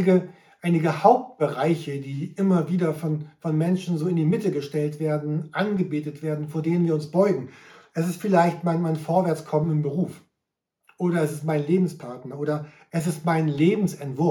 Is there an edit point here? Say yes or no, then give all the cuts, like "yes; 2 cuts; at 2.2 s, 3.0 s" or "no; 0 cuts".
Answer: no; 0 cuts